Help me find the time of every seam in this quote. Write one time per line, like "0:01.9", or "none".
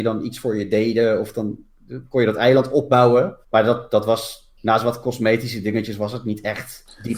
0:03.4
0:04.6

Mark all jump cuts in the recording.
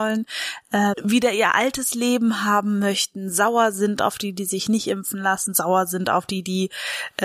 0:00.9

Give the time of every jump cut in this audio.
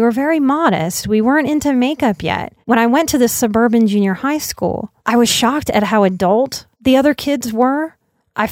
0:02.6
0:05.0
0:06.7

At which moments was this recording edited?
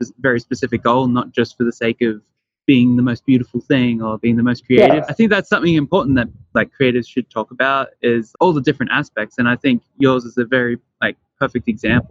0:05.1
0:08.3

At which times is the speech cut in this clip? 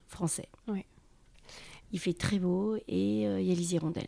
0:01.8

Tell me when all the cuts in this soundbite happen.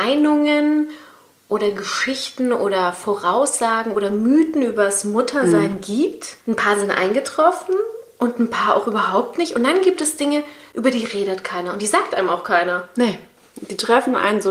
0:06.4

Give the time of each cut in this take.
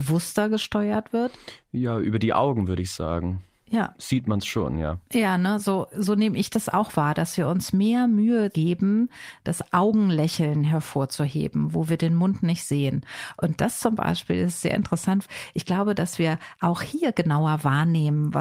none

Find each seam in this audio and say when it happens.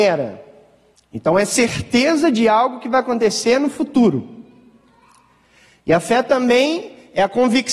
0:01.0

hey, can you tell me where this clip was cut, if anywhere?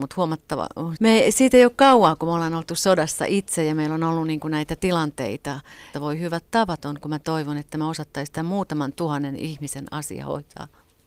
0:01.0
0:05.9

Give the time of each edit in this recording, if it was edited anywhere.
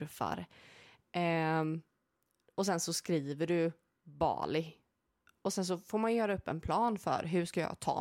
none

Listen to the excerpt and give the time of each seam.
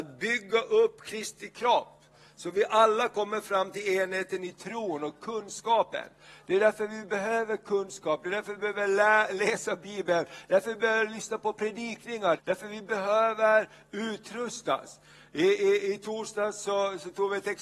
0:12.4

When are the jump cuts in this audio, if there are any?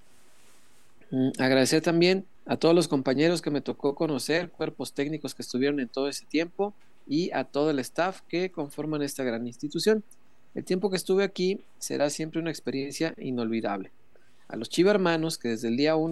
0:02.3

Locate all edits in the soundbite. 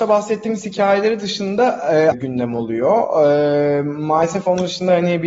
0:02.1

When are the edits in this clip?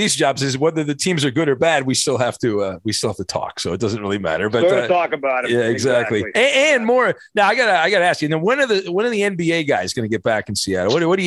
none

